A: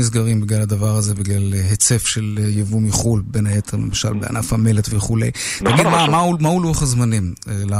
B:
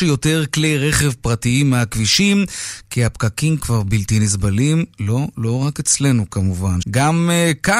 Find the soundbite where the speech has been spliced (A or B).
B